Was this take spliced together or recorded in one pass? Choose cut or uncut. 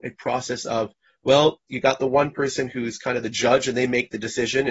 uncut